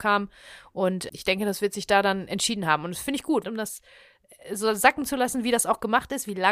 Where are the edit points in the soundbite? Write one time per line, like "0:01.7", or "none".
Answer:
0:01.1
0:03.4